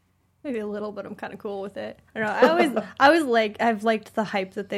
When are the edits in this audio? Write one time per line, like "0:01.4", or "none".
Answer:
0:02.1